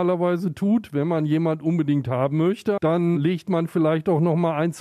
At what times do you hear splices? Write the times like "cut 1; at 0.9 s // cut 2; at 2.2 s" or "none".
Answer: cut 1; at 3.1 s